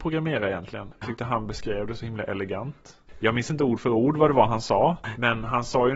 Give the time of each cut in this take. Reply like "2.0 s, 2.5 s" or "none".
none